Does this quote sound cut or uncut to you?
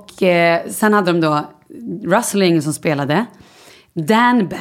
uncut